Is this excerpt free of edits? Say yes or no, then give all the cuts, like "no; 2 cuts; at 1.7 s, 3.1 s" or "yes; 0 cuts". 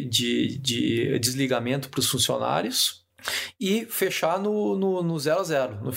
yes; 0 cuts